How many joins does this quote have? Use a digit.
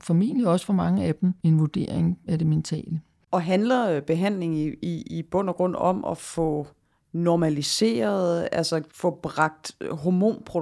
1